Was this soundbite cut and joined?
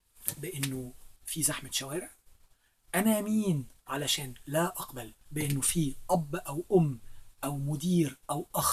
yes; 2 cuts; at 1.2 s, 5.2 s

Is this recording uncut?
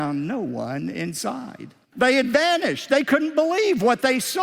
no; 1 cut; at 1.8 s

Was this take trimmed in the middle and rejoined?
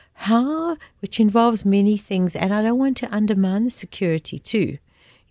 yes; 1 cut; at 0.9 s

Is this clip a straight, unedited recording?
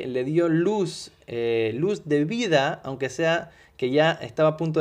yes; 0 cuts

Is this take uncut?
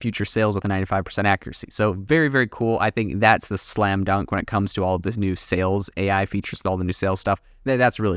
yes; 0 cuts

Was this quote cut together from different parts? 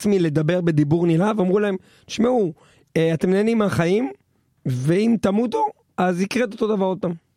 no; 0 cuts

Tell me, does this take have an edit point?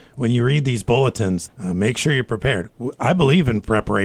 yes; 1 cut; at 1.5 s

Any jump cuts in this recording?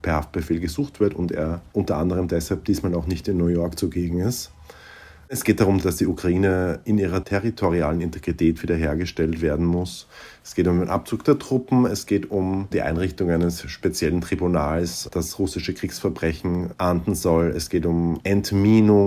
no; 0 cuts

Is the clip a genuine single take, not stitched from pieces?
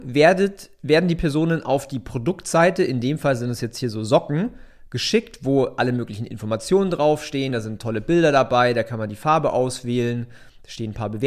yes; 0 cuts

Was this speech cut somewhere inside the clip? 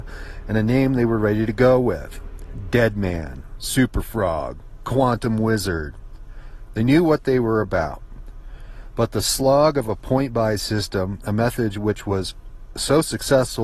no; 0 cuts

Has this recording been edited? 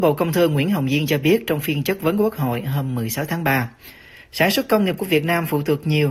no; 0 cuts

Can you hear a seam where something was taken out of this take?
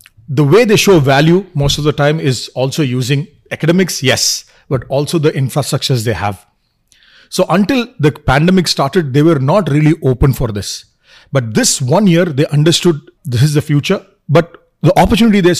yes; 1 cut; at 13.2 s

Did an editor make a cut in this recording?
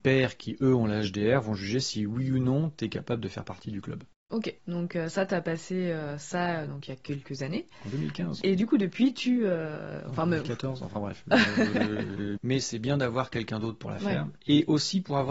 yes; 2 cuts; at 4.6 s, 12.4 s

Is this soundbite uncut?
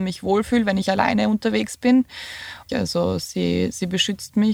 no; 1 cut; at 2.7 s

